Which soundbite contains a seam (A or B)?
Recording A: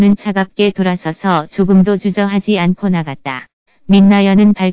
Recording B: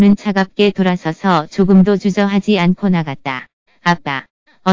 A